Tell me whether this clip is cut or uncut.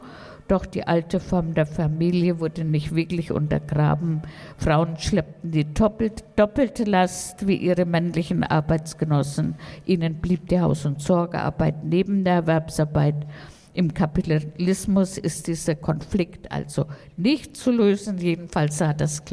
uncut